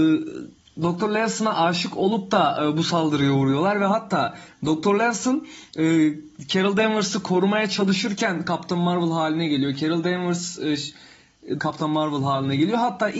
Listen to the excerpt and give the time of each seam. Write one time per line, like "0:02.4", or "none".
0:11.6